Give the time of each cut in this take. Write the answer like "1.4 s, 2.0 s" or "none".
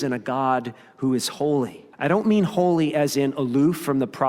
1.9 s